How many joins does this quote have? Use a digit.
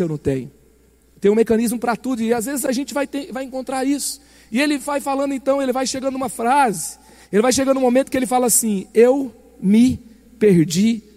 0